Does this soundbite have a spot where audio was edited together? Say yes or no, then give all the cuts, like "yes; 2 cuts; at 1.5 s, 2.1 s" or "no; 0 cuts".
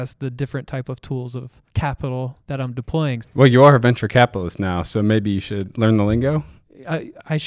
yes; 2 cuts; at 1.7 s, 3.2 s